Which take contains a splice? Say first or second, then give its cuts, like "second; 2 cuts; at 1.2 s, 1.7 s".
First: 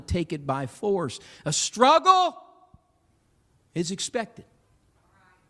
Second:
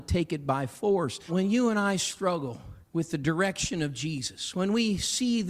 second; 2 cuts; at 1.3 s, 2.8 s